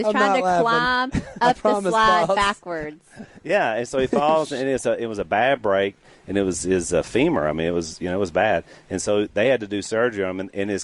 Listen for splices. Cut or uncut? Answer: uncut